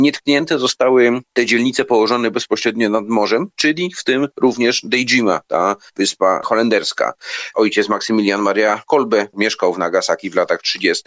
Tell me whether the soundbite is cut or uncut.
cut